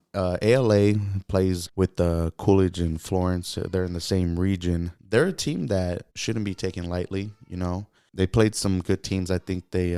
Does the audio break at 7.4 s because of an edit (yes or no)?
no